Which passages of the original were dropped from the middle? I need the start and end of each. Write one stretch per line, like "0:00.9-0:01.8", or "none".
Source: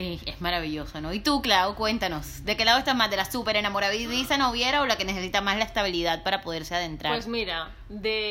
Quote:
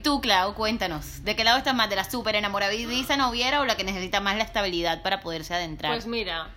none